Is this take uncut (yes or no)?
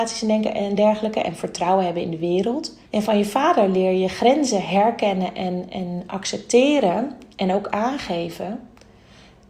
no